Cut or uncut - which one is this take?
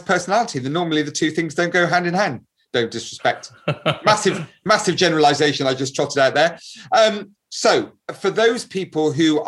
uncut